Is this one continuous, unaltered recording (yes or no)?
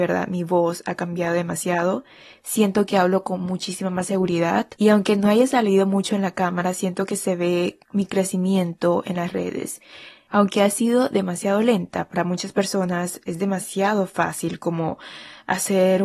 yes